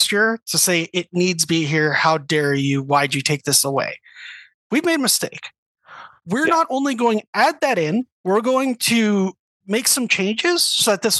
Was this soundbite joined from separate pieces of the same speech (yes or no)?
yes